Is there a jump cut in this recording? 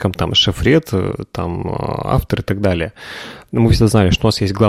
no; 0 cuts

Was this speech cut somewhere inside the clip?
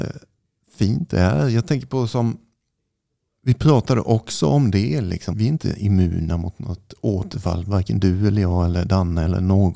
yes; 1 cut; at 5.3 s

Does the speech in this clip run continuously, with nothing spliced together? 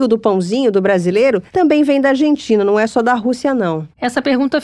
yes; 0 cuts

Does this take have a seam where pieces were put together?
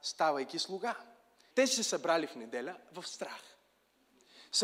yes; 1 cut; at 1.5 s

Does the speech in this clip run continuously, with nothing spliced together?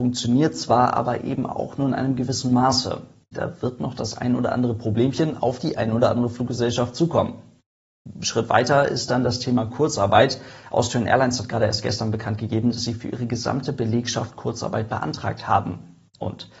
no; 2 cuts; at 3.3 s, 7.9 s

